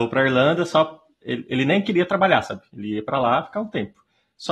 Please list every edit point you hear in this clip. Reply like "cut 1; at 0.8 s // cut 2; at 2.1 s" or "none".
none

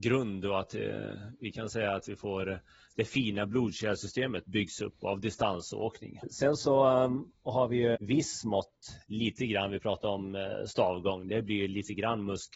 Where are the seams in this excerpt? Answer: cut 1; at 6.2 s // cut 2; at 7.9 s

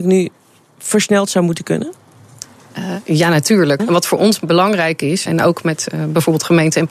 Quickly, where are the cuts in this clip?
cut 1; at 3.8 s // cut 2; at 5.3 s

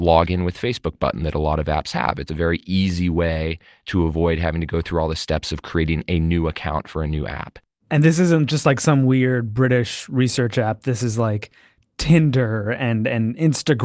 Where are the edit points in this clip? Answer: none

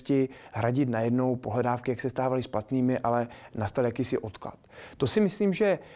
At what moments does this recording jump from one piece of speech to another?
none

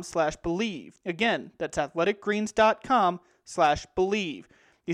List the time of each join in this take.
cut 1; at 1.0 s

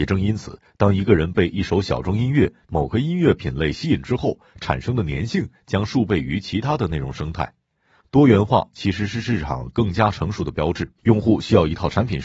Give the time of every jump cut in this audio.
cut 1; at 8.0 s // cut 2; at 11.0 s

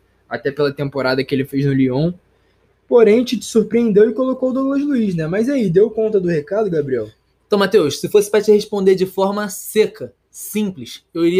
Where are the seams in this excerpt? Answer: none

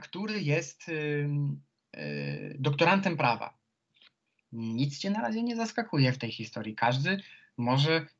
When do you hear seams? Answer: none

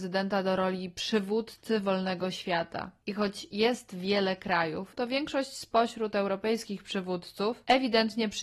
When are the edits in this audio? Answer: cut 1; at 4.9 s

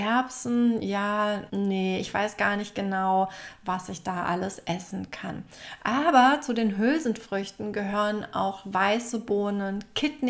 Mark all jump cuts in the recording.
cut 1; at 1.5 s

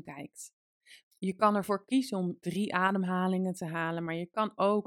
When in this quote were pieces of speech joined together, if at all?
cut 1; at 1.0 s // cut 2; at 2.4 s

